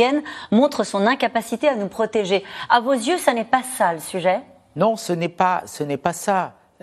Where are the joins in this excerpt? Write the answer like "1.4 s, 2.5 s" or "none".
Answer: none